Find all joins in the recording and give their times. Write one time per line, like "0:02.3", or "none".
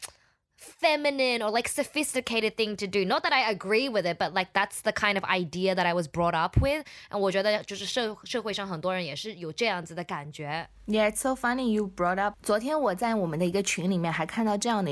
none